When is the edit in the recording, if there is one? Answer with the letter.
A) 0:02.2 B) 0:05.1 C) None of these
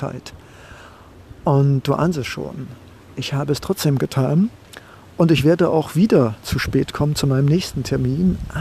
C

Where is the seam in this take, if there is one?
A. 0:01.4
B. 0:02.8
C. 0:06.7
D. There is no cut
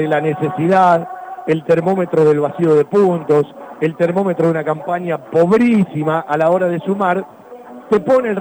D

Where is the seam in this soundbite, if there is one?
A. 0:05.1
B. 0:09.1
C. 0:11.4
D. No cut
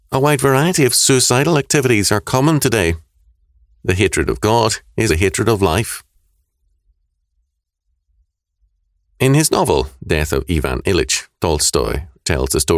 A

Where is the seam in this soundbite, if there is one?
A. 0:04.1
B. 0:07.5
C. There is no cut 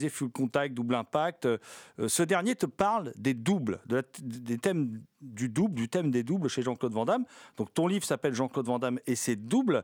C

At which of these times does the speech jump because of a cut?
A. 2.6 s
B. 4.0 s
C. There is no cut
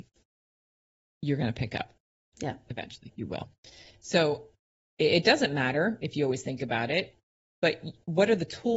C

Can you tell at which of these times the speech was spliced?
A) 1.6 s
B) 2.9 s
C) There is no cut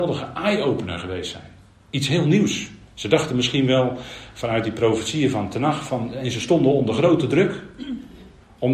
B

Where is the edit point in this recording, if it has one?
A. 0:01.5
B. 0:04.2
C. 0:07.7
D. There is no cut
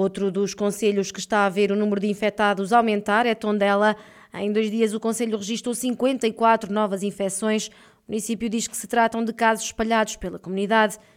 D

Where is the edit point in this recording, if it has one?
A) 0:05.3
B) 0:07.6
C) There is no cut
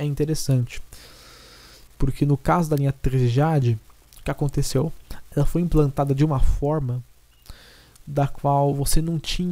C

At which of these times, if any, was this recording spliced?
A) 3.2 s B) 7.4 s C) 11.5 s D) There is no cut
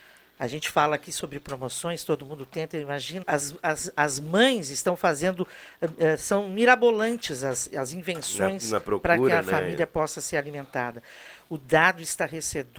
A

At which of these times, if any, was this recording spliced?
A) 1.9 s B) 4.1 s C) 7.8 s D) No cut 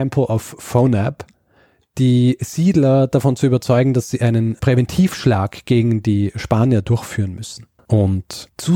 C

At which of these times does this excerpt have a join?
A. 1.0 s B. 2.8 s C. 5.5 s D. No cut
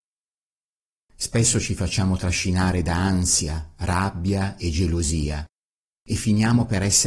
A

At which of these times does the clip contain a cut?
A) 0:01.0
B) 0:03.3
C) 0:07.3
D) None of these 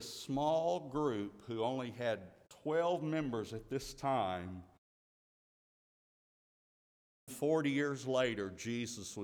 C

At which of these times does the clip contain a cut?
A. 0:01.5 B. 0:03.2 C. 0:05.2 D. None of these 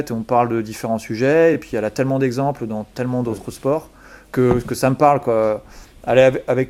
D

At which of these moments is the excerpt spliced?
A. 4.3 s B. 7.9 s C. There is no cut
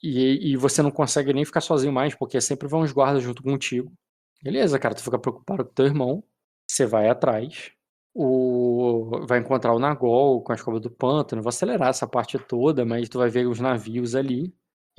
A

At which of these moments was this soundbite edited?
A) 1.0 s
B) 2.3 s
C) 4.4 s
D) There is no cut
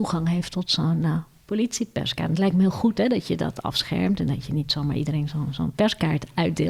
D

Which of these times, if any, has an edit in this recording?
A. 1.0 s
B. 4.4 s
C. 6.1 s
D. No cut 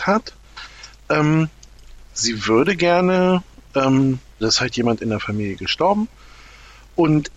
B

